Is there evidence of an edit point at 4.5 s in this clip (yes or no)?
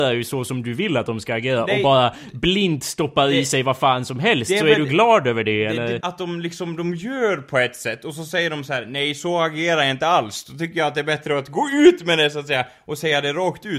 no